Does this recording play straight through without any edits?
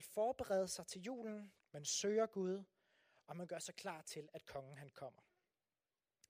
no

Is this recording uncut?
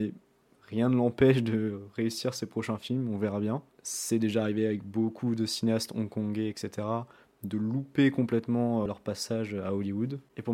no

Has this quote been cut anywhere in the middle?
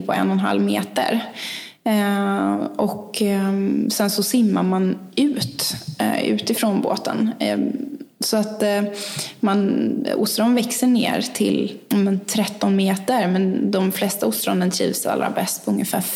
no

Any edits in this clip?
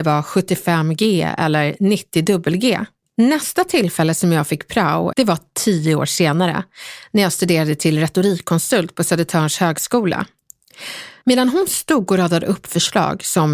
yes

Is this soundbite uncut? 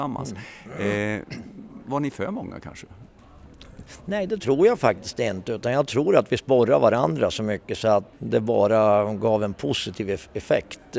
no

